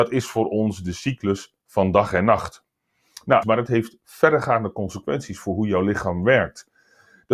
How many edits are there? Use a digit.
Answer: 1